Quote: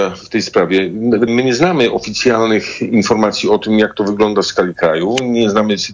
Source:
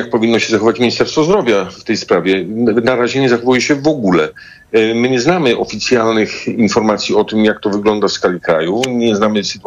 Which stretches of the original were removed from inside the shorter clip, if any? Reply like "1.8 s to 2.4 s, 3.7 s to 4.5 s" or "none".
2.8 s to 4.9 s